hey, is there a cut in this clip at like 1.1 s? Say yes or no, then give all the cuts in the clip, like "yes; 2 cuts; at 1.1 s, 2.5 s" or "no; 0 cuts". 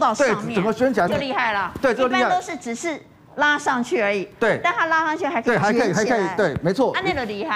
yes; 1 cut; at 1.1 s